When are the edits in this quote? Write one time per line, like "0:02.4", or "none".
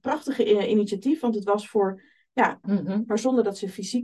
0:02.6